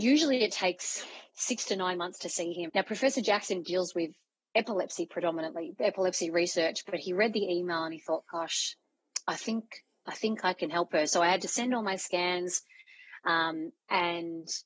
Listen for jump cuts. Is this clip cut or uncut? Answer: cut